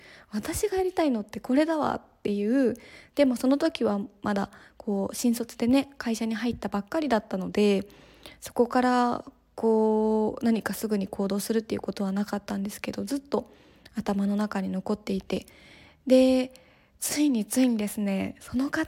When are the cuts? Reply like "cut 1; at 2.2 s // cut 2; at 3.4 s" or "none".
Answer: cut 1; at 3.1 s